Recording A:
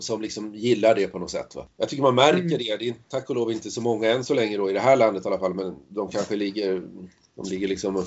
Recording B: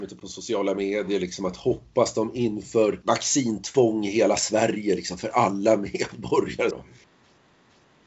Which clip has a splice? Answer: B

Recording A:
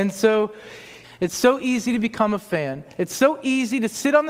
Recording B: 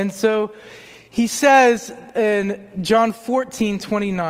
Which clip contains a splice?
A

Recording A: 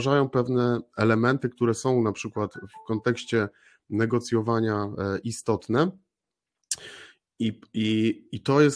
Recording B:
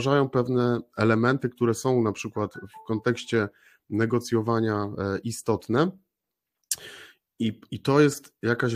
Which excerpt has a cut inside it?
B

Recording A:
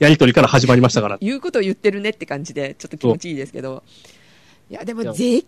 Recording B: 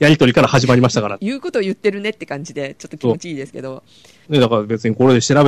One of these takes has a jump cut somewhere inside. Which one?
B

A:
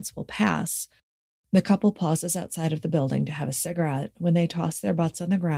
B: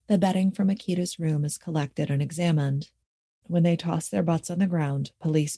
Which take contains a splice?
B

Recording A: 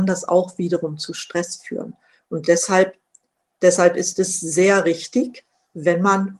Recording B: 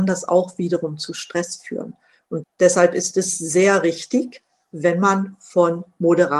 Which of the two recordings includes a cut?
B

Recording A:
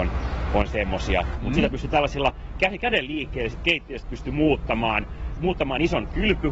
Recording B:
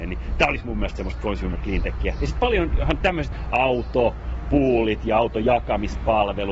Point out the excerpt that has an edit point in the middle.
A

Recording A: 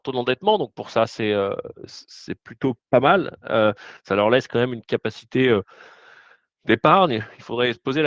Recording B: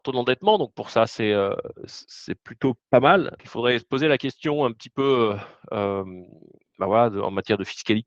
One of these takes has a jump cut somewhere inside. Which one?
B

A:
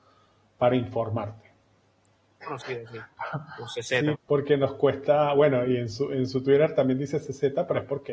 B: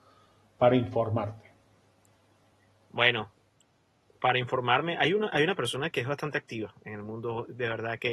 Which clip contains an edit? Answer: A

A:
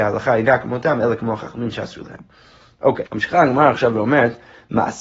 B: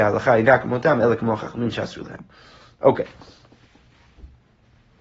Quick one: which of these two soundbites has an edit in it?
A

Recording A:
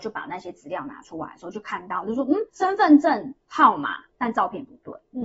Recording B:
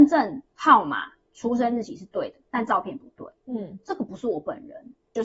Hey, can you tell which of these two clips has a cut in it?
A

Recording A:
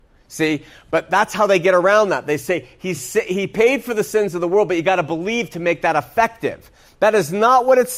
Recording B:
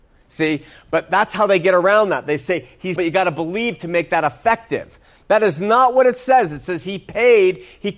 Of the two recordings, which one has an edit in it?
B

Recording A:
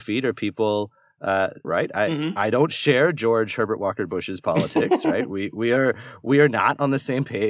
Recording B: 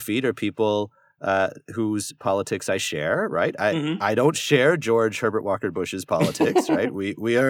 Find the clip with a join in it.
A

